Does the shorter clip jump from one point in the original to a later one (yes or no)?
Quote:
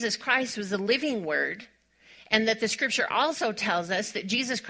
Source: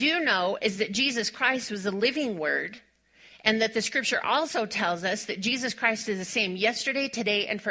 no